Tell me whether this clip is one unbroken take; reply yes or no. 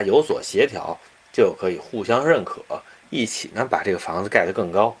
yes